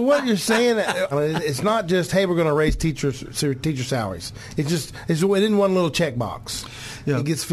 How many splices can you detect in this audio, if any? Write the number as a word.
one